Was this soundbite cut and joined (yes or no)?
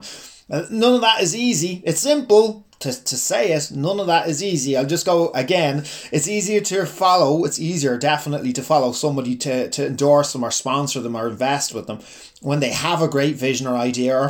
no